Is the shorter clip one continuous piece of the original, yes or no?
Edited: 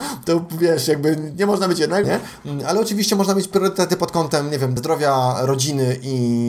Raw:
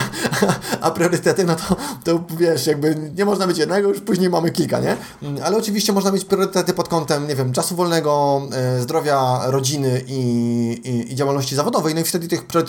no